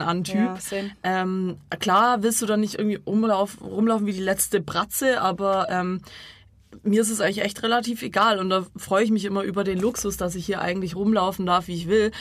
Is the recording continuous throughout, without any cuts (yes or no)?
yes